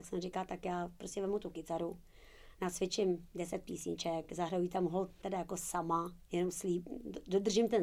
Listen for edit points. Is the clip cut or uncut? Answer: uncut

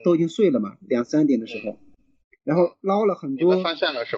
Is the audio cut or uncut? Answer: uncut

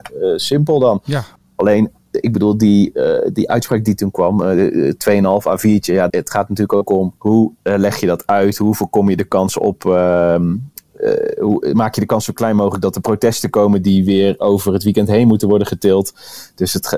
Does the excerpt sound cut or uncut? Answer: cut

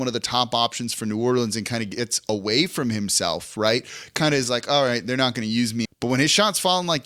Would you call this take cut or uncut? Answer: cut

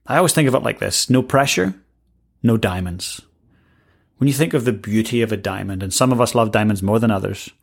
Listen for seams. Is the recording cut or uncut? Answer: uncut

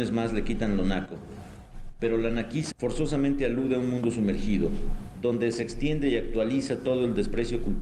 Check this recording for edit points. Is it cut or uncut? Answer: cut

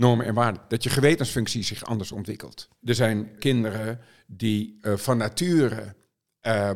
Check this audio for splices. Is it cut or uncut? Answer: cut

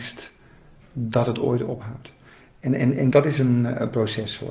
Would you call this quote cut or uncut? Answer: cut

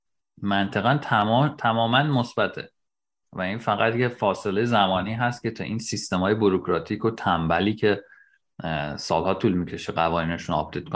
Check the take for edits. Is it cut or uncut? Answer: uncut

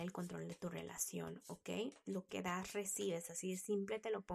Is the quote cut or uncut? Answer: uncut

